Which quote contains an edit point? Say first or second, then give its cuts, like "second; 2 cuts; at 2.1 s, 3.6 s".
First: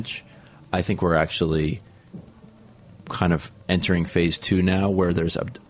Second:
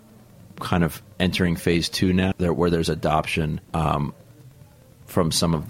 second; 2 cuts; at 2.3 s, 3.6 s